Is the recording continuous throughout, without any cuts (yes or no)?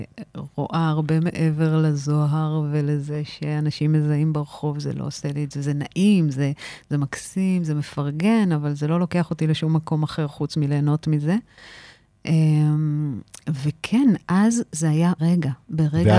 no